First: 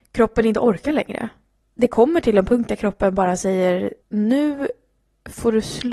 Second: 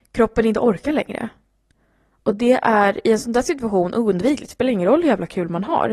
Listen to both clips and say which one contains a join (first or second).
first